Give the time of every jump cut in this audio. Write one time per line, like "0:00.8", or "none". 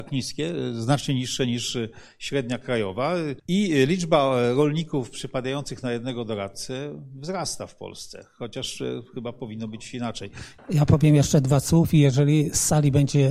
0:03.4
0:10.6